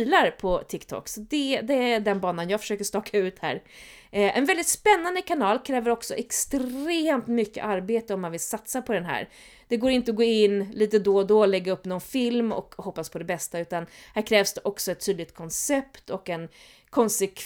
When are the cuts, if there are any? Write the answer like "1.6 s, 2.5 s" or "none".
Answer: none